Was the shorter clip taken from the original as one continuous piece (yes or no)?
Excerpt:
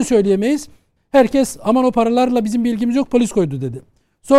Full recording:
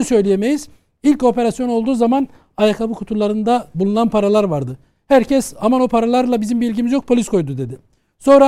no